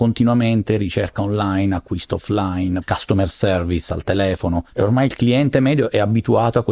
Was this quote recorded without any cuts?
no; 1 cut; at 2.8 s

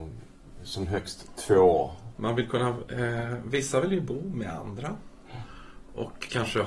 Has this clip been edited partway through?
yes; 1 cut; at 2.1 s

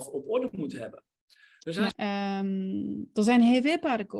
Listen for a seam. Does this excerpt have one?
yes; 1 cut; at 1.9 s

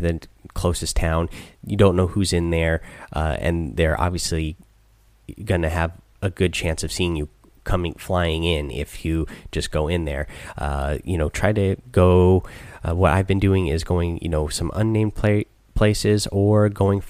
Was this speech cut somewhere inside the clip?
no; 0 cuts

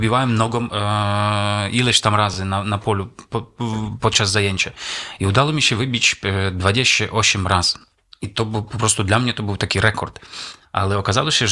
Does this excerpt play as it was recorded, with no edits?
yes; 0 cuts

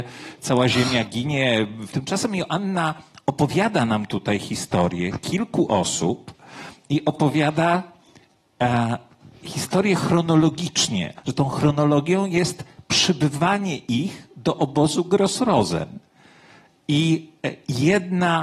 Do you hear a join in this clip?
yes; 2 cuts; at 1.9 s, 11.2 s

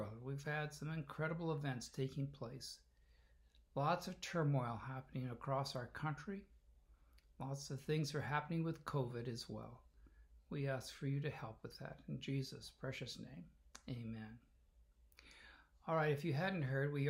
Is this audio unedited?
yes; 0 cuts

